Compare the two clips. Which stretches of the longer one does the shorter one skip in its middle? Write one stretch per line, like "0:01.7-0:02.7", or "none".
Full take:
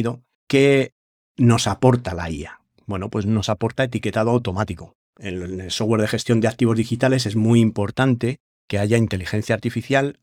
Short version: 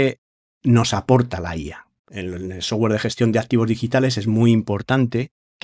0:02.7-0:05.1